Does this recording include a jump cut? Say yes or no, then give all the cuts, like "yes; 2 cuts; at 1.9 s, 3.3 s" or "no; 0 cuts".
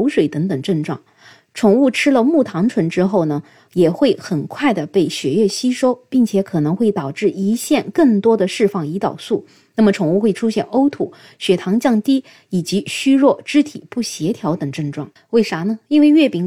yes; 1 cut; at 15.2 s